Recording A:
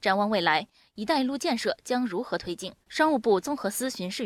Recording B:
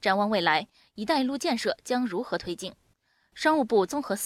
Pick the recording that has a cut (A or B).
A